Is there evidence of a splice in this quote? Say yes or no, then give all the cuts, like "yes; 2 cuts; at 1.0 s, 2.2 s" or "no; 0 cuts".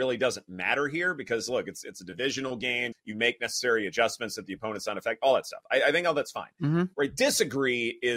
yes; 1 cut; at 2.9 s